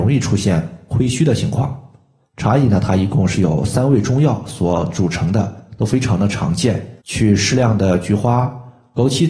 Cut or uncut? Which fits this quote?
cut